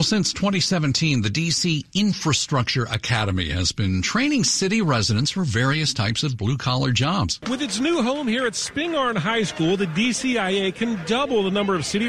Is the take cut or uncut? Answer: cut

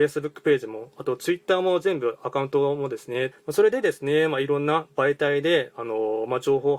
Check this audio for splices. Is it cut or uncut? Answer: cut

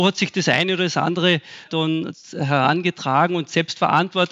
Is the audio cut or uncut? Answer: uncut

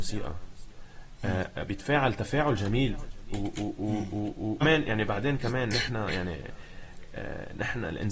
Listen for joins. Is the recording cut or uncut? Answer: cut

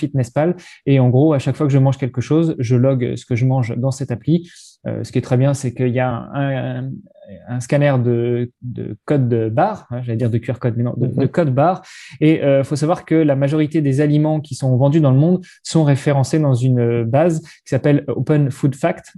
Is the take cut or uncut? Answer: uncut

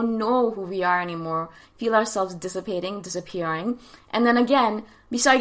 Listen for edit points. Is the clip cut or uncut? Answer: cut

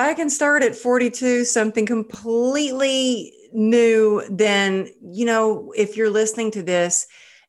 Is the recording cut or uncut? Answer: uncut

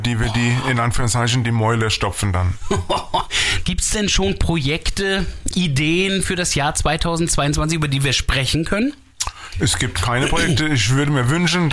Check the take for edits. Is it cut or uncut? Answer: cut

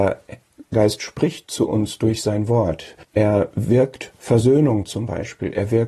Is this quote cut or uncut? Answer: cut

